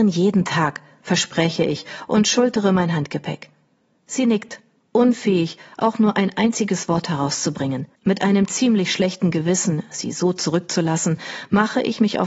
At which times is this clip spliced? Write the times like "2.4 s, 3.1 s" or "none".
8.0 s